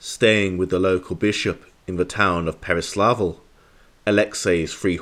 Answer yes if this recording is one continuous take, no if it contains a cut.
yes